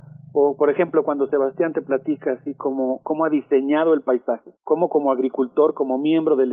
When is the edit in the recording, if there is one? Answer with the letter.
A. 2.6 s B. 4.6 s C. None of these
B